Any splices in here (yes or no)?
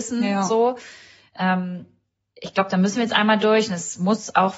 no